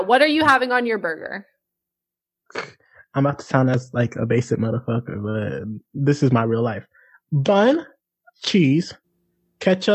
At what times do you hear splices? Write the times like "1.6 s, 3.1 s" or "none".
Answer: none